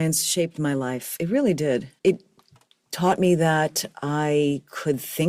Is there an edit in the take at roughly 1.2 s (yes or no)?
no